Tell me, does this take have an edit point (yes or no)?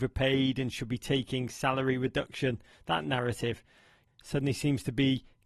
yes